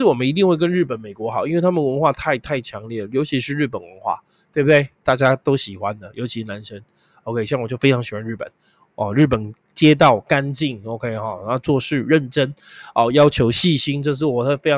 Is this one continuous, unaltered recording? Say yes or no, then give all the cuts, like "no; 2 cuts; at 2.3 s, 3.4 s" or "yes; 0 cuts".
yes; 0 cuts